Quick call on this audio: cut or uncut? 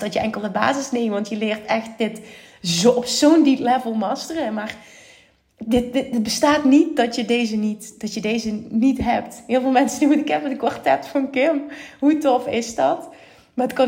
uncut